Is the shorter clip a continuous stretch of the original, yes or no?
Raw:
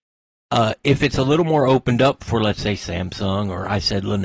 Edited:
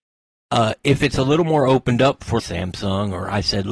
no